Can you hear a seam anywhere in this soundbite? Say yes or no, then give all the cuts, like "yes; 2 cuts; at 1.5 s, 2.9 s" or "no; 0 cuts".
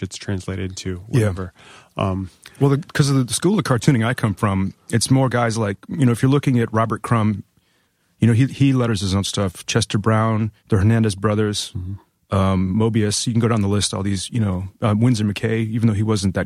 yes; 1 cut; at 10.6 s